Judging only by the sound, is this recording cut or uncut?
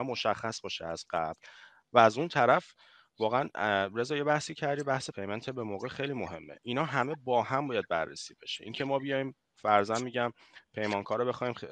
cut